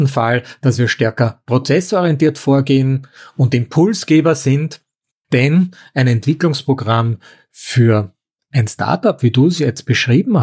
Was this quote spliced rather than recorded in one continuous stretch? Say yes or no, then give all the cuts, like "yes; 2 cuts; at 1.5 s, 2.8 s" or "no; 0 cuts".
yes; 1 cut; at 5.2 s